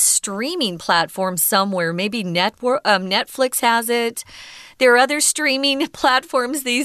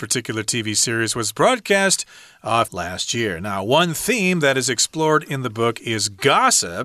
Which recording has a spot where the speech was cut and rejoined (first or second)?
second